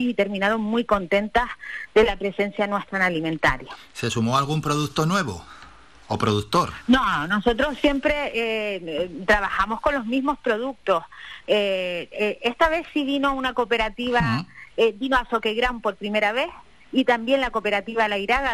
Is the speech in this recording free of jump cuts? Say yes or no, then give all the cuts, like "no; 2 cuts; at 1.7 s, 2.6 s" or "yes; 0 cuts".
yes; 0 cuts